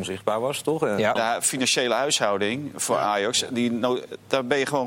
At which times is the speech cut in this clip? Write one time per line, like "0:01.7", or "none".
0:01.2